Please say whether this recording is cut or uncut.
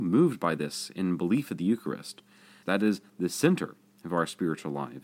cut